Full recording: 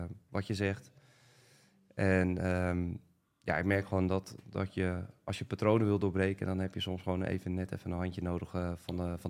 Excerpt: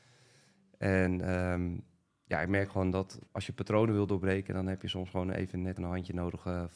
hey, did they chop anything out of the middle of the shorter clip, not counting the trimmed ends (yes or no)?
yes